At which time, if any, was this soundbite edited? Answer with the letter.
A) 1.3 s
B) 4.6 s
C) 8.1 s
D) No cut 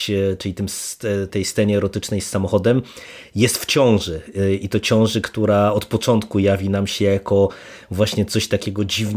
A